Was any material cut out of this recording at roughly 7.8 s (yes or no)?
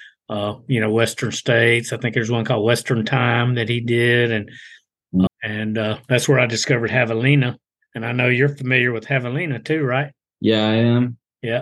no